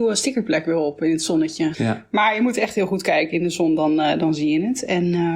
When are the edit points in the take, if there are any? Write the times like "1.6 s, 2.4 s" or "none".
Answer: 1.7 s